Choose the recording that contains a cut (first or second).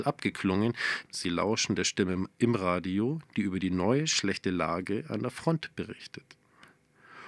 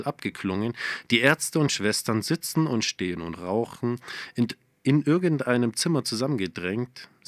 first